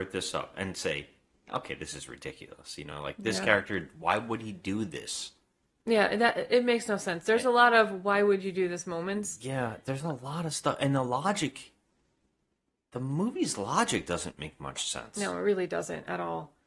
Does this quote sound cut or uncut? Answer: uncut